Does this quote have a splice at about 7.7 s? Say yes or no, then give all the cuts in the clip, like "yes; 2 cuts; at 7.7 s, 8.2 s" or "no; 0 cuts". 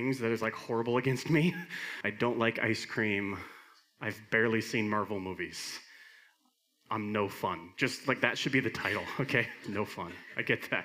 no; 2 cuts; at 2.0 s, 9.6 s